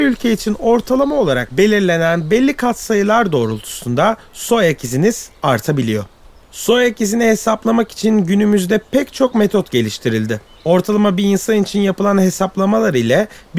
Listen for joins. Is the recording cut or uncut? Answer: uncut